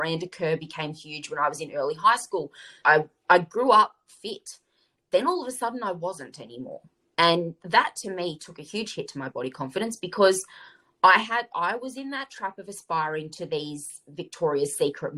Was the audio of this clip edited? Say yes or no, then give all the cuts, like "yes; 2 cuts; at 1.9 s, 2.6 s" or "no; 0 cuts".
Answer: yes; 1 cut; at 2.8 s